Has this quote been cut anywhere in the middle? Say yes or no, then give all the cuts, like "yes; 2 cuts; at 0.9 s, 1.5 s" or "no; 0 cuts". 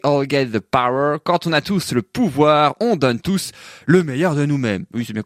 no; 0 cuts